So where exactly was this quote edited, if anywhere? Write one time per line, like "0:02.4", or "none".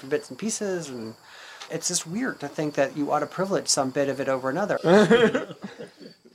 0:01.7
0:04.8